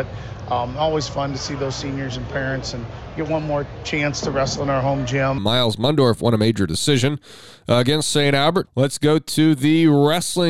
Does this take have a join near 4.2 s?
no; 2 cuts; at 5.4 s, 8.6 s

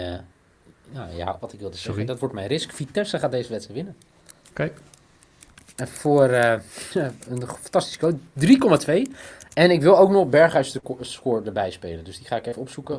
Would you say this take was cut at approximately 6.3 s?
no; 1 cut; at 1.4 s

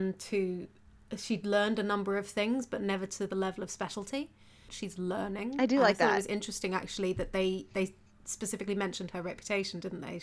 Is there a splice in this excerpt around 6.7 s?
no; 1 cut; at 4.7 s

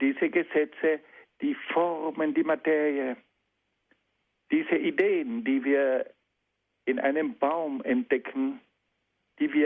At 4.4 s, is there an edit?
yes; 1 cut; at 4.4 s

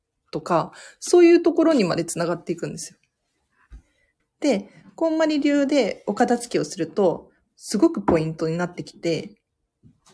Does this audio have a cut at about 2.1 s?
no; 2 cuts; at 4.2 s, 7.4 s

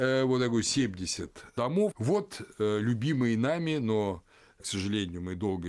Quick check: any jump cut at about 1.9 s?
yes; 1 cut; at 1.9 s

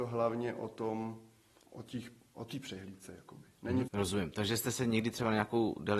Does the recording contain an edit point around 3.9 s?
yes; 2 cuts; at 1.6 s, 3.9 s

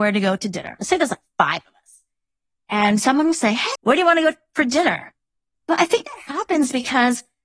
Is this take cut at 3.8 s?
yes; 2 cuts; at 3.8 s, 5.5 s

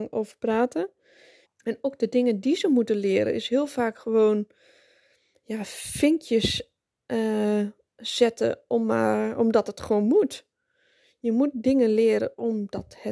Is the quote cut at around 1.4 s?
yes; 1 cut; at 1.4 s

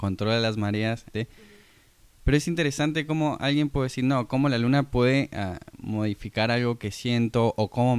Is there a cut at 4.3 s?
no; 1 cut; at 1.1 s

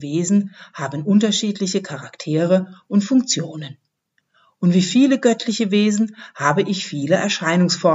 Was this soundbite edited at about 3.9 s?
no; 0 cuts

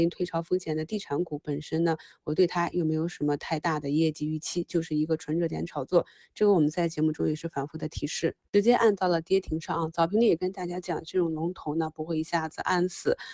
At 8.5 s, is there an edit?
yes; 1 cut; at 8.5 s

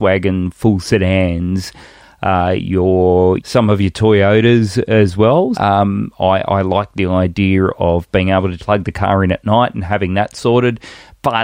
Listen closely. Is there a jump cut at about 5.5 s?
yes; 3 cuts; at 3.4 s, 5.5 s, 8.6 s

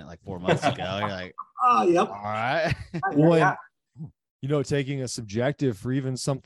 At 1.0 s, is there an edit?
no; 1 cut; at 3.9 s

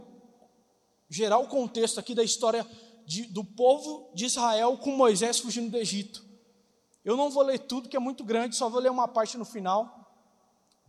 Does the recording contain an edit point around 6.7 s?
no; 0 cuts

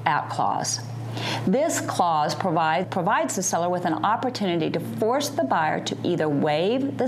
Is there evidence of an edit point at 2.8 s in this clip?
yes; 1 cut; at 2.8 s

